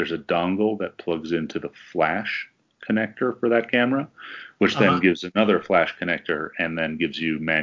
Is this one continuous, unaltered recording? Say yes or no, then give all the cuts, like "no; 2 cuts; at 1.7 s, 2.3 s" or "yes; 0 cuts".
yes; 0 cuts